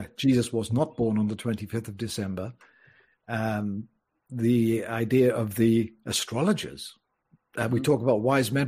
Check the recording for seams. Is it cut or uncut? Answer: uncut